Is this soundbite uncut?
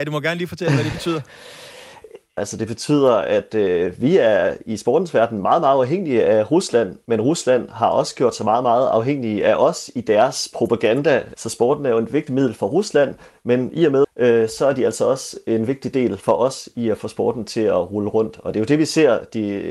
no; 3 cuts; at 2.4 s, 11.3 s, 14.0 s

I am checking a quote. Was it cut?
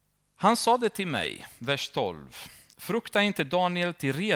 no; 0 cuts

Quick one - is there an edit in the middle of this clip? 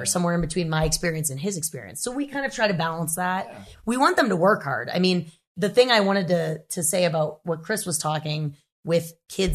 no; 0 cuts

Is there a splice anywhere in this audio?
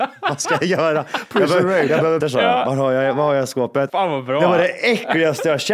yes; 2 cuts; at 2.2 s, 3.9 s

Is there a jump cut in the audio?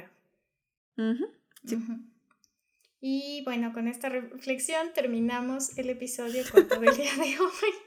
no; 0 cuts

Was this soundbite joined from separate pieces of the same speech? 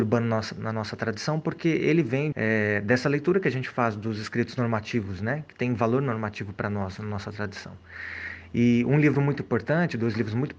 yes; 1 cut; at 2.3 s

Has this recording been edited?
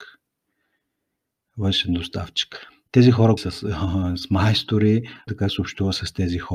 yes; 2 cuts; at 3.4 s, 5.3 s

